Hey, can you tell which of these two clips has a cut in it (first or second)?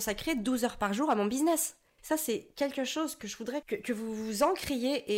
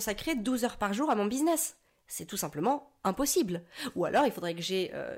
first